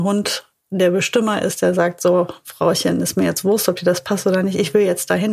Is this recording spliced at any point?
no; 0 cuts

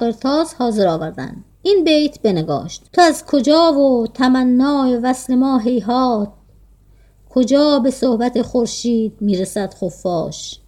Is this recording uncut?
no; 2 cuts; at 1.5 s, 2.9 s

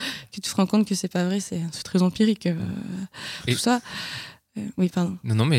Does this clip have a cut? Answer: no; 0 cuts

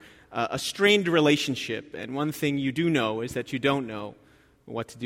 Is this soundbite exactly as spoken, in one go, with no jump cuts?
yes; 0 cuts

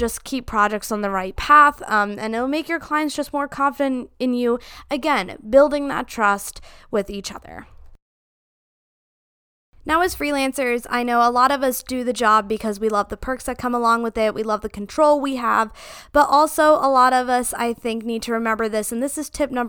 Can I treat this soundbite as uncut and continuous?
yes; 0 cuts

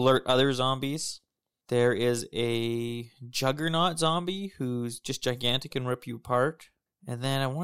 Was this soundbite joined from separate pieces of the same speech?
no; 0 cuts

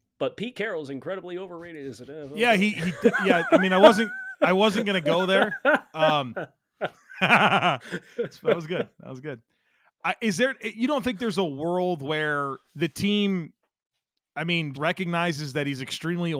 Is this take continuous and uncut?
no; 2 cuts; at 12.7 s, 14.7 s

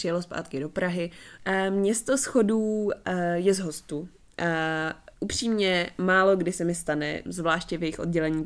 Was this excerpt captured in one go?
no; 3 cuts; at 1.4 s, 5.1 s, 7.3 s

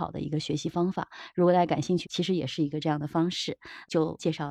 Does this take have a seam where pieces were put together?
yes; 1 cut; at 2.0 s

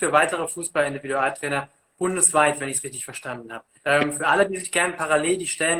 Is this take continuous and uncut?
no; 1 cut; at 3.8 s

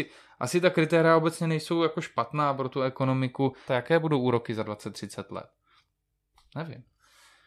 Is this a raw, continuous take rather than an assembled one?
no; 1 cut; at 3.7 s

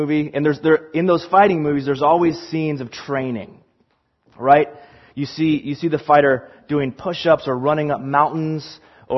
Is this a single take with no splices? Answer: yes; 0 cuts

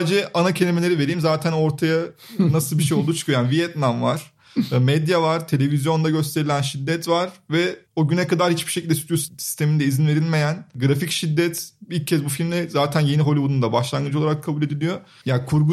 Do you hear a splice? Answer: no; 0 cuts

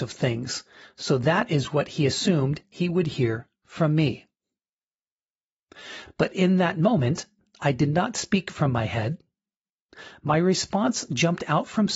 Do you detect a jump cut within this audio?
no; 0 cuts

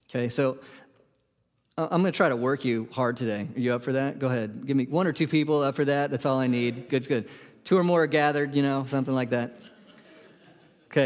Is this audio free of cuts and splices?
no; 1 cut; at 6.9 s

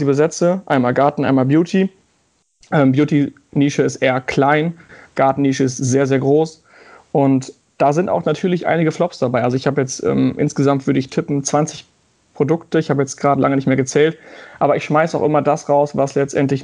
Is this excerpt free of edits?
yes; 0 cuts

